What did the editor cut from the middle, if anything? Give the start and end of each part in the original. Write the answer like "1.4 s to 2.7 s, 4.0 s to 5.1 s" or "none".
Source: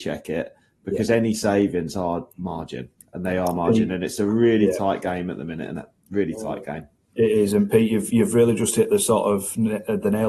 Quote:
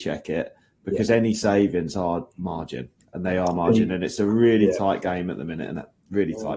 none